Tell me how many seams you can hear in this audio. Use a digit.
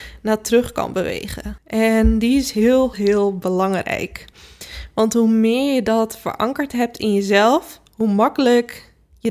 2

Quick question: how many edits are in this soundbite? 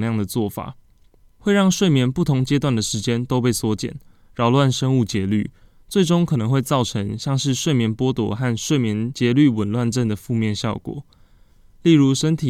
0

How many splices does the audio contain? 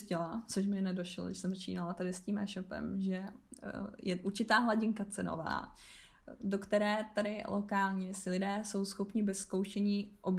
0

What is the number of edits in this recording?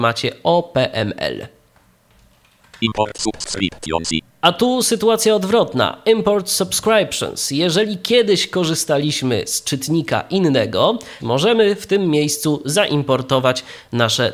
1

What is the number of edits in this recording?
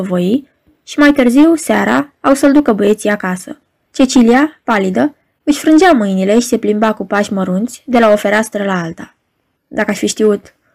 2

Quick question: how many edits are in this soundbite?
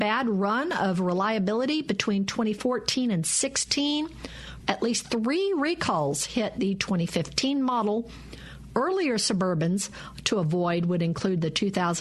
1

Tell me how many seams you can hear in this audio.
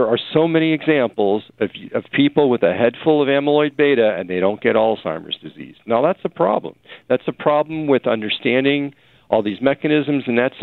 0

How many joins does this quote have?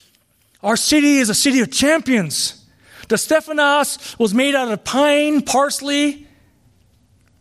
0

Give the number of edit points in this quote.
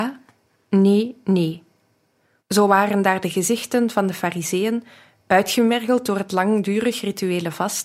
1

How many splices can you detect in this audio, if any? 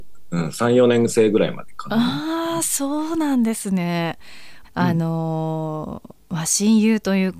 1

